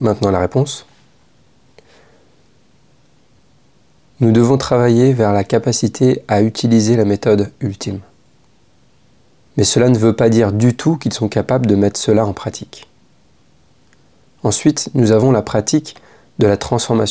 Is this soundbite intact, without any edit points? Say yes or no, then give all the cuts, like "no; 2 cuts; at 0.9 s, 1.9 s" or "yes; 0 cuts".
no; 1 cut; at 9.5 s